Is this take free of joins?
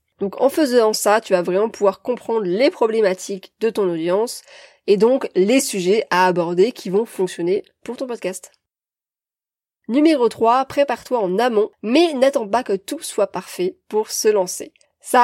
yes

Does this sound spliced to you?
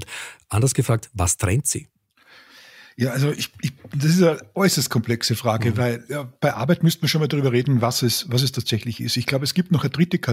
no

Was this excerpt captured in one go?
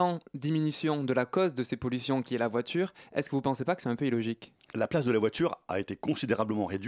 no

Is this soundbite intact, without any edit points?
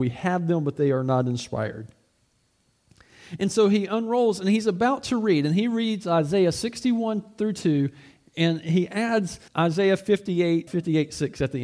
no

